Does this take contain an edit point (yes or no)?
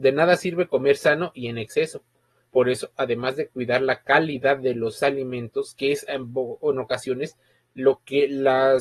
no